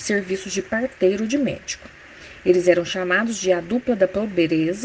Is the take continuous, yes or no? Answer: yes